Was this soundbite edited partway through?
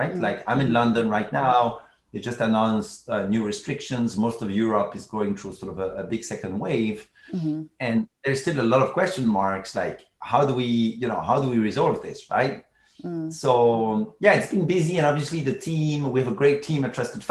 no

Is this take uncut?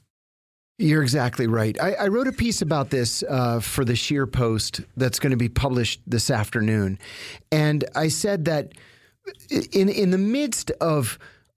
yes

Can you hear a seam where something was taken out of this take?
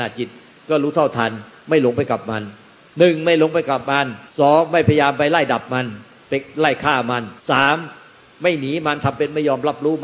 yes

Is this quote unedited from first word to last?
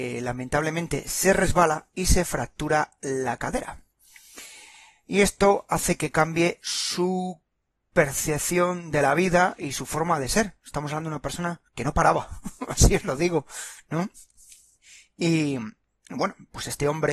no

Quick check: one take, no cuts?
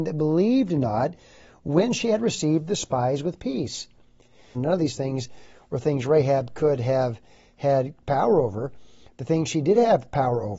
no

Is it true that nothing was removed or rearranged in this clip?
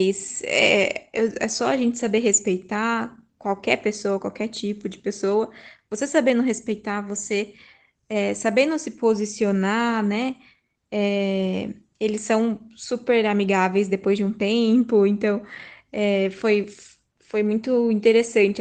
yes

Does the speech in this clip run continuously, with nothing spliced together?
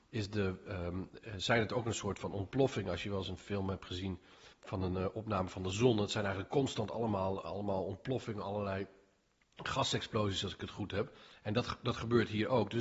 no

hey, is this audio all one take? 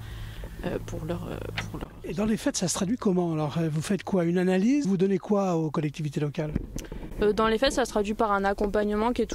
no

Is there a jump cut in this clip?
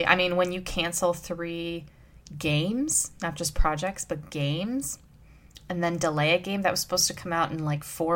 no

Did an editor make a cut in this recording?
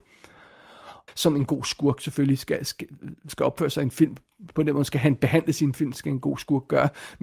yes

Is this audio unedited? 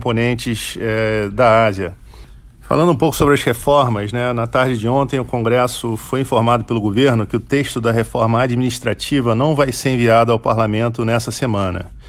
yes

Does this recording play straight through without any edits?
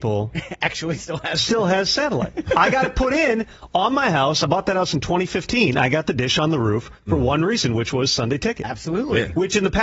yes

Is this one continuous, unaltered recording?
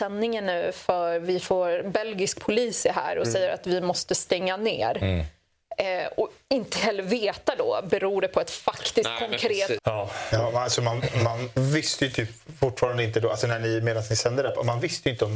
no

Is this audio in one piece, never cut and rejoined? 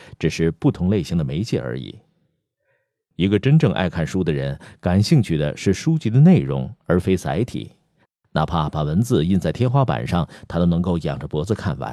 yes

